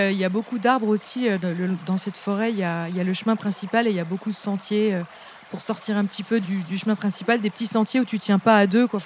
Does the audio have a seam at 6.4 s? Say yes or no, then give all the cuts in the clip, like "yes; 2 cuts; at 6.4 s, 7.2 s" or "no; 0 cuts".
yes; 1 cut; at 6.4 s